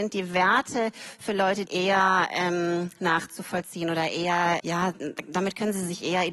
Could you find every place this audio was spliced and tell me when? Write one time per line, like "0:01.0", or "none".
0:01.7
0:04.6